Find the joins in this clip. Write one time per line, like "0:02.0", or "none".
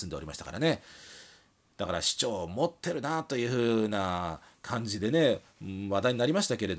0:01.7

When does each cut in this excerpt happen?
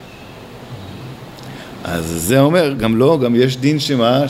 none

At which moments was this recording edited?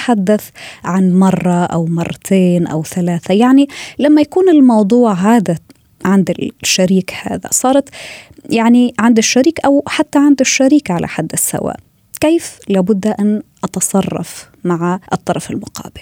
0:15.1

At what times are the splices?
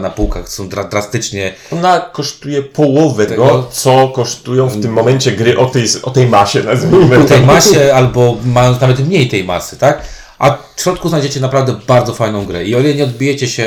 0:03.3

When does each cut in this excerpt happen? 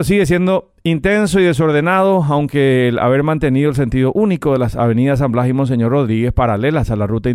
none

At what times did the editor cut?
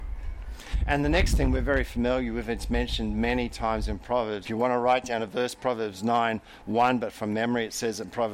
0:04.4

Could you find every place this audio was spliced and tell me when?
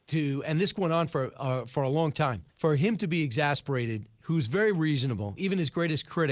0:02.5
0:05.4

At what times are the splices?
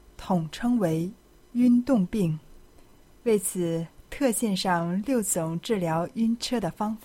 none

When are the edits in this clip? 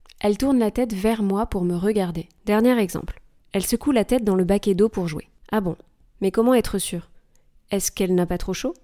0:02.4

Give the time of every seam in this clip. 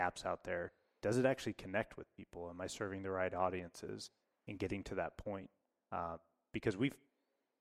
none

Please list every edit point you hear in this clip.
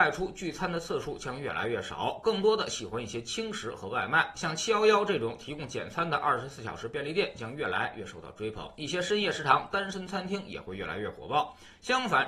0:04.3

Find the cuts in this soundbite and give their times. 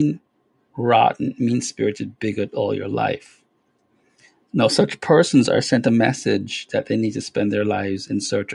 none

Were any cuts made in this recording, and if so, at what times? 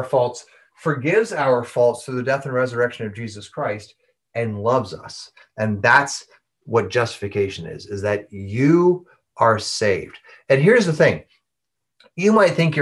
none

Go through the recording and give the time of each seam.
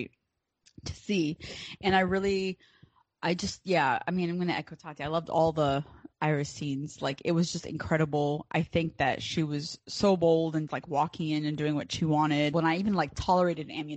0:10.7
0:12.5

